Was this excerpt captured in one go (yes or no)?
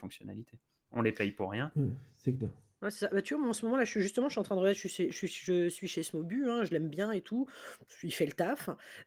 yes